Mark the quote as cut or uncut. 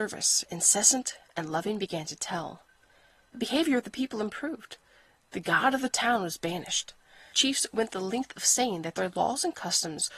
uncut